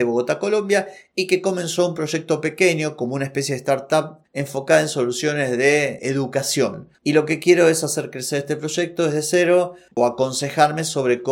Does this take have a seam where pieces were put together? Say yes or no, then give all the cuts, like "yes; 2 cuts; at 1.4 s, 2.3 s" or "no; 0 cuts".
yes; 2 cuts; at 6.0 s, 10.0 s